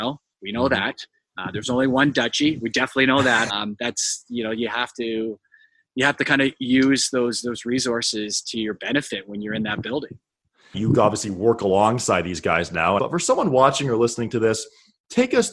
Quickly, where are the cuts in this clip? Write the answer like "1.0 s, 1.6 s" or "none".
3.5 s, 10.7 s, 13.0 s